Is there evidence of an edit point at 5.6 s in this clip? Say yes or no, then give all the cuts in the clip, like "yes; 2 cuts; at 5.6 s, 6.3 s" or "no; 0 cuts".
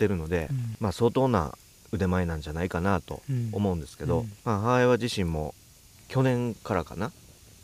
no; 1 cut; at 4.4 s